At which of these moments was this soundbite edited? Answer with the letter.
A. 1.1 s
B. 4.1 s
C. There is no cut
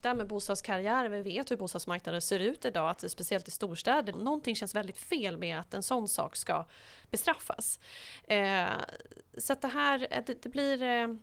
B